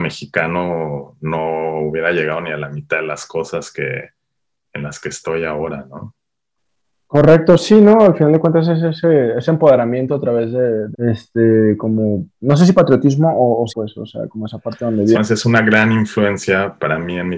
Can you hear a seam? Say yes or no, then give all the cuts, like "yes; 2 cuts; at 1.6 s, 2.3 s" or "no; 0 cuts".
yes; 3 cuts; at 10.9 s, 13.7 s, 15.1 s